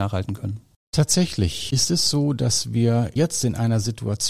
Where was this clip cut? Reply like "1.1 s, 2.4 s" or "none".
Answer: 3.2 s